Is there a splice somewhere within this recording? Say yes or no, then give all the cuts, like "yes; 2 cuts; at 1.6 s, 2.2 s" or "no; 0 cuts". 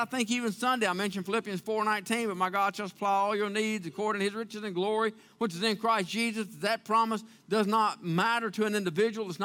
no; 0 cuts